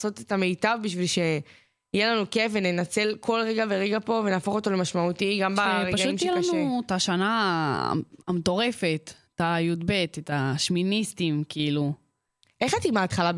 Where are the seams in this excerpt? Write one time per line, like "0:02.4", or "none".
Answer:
none